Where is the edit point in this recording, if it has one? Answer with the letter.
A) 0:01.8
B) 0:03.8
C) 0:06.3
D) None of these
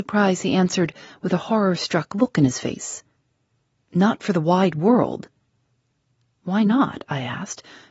B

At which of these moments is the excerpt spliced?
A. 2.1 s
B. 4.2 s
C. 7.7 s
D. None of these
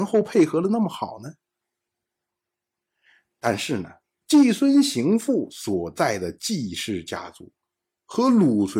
B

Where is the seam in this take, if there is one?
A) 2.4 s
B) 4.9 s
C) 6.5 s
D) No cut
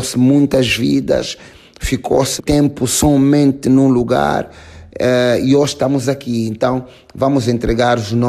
A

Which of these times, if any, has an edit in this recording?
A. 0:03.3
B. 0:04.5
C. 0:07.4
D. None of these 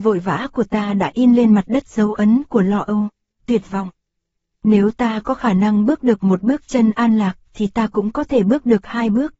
A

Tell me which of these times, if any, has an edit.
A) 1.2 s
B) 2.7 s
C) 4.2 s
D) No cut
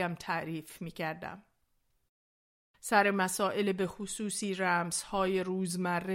B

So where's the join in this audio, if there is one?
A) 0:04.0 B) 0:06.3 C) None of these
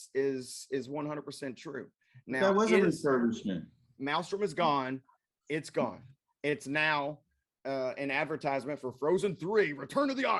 A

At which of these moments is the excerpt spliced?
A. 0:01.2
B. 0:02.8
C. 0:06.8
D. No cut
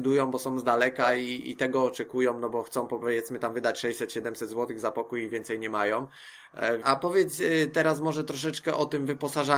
C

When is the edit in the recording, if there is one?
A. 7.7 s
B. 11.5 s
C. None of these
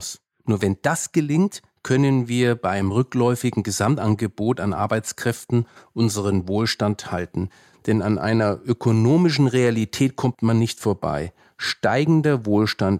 C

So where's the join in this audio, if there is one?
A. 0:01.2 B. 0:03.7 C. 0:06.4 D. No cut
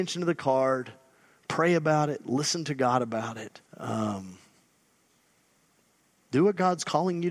B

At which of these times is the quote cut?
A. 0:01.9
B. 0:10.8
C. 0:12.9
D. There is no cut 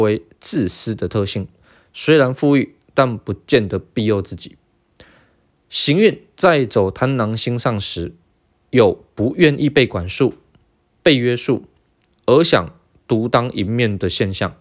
D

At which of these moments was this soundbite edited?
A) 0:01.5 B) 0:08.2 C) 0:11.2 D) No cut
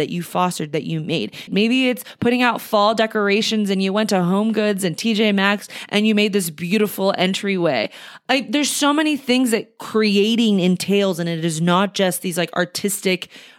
A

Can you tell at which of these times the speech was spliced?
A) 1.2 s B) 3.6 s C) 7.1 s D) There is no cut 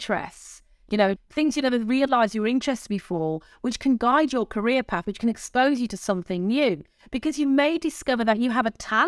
A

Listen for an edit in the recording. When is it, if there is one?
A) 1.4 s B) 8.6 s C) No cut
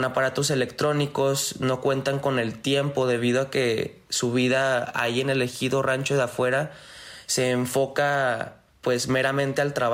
C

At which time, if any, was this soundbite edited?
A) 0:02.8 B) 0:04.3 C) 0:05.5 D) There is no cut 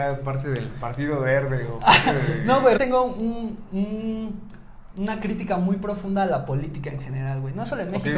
A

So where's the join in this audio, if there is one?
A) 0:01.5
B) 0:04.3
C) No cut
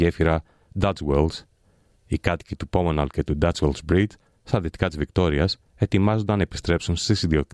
C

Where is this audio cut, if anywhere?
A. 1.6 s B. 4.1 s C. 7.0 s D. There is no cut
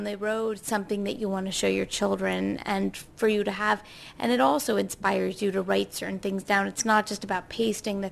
D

